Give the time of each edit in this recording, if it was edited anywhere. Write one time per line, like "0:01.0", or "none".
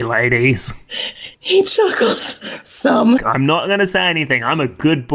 0:01.3
0:03.2